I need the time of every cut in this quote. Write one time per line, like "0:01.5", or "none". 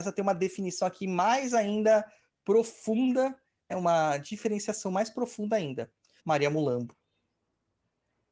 0:03.7
0:06.2

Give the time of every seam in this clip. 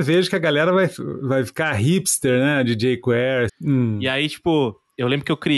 0:03.5

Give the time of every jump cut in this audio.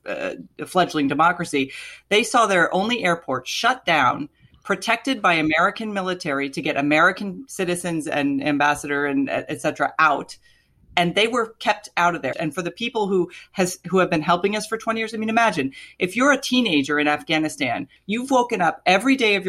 0:12.3
0:18.0

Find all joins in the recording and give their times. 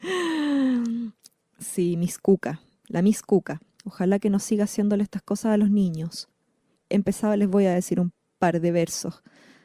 0:03.8
0:06.8

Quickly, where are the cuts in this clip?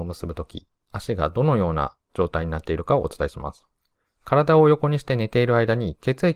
0:04.0

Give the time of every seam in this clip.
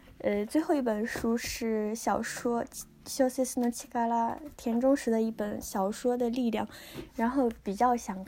0:07.1

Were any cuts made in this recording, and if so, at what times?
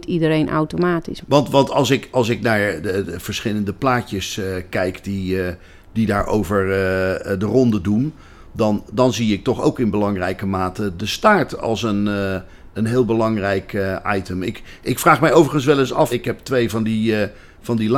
0:01.2
0:16.1

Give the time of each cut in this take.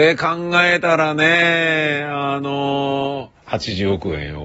0:03.4

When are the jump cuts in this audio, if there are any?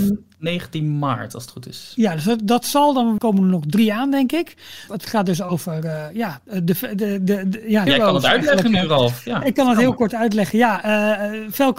0:03.2
0:04.9
0:07.9

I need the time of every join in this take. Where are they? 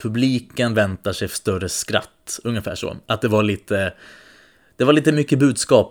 none

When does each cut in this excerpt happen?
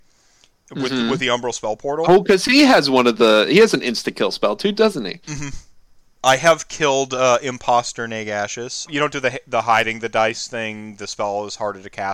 0:06.1
0:08.9

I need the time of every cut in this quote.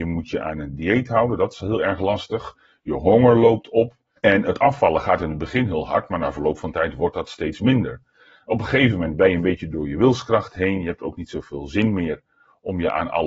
0:04.2

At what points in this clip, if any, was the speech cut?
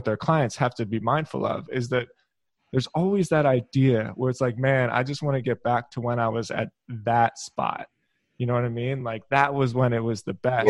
none

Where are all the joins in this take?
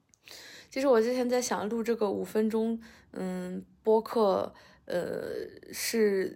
none

